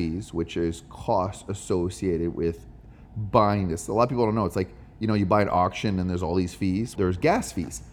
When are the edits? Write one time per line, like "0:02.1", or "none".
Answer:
0:07.0